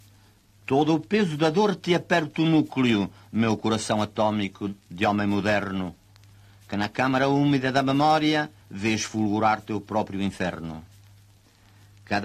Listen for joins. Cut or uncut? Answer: cut